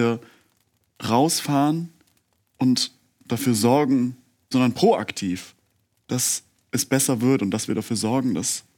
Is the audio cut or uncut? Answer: cut